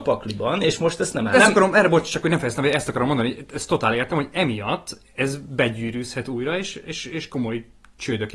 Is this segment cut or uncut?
cut